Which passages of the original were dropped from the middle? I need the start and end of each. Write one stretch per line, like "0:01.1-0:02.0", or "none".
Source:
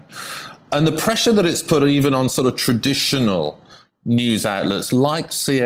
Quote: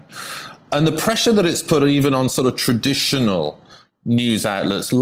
none